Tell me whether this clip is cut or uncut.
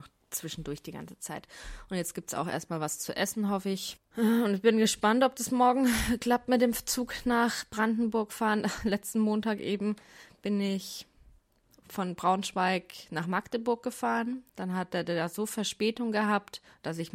cut